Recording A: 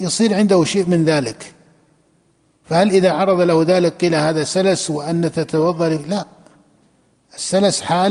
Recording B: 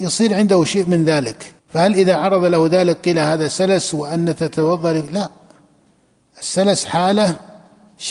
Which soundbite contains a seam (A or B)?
B